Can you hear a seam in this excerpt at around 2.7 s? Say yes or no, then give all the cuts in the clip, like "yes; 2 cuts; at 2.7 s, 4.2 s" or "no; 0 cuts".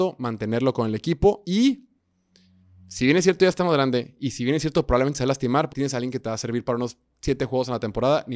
no; 1 cut; at 5.7 s